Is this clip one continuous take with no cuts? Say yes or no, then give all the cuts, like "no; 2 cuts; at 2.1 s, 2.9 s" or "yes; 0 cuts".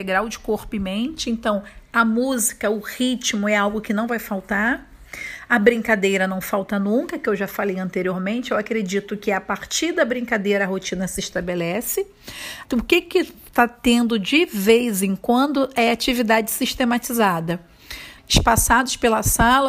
no; 2 cuts; at 12.6 s, 18.2 s